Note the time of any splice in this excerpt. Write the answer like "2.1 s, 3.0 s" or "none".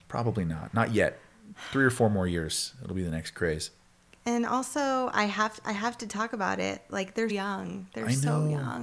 7.3 s